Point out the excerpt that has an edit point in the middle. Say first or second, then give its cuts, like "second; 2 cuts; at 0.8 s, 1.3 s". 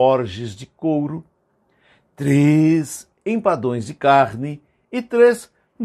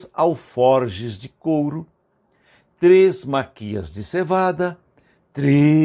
first; 1 cut; at 2.1 s